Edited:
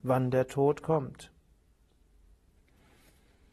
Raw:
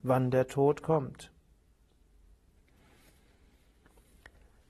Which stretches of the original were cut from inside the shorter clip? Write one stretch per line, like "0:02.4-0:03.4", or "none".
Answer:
none

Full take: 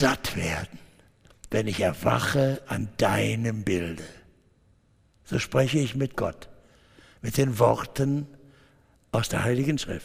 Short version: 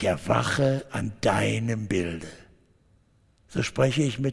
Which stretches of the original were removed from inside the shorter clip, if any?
none

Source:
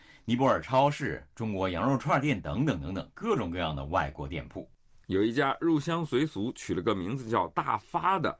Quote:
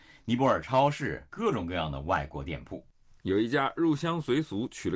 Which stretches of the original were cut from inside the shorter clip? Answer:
0:01.3-0:03.1

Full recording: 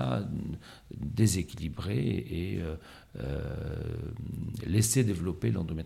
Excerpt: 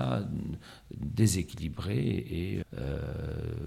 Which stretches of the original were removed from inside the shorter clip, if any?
0:02.6-0:03.0

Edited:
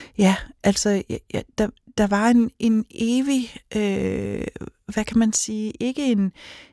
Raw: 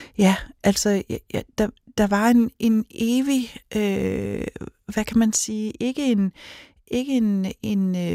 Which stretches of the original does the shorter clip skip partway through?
none

